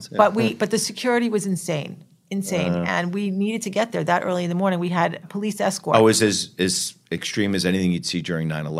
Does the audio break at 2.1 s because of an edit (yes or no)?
no